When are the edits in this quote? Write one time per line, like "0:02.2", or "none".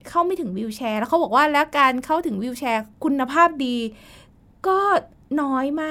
none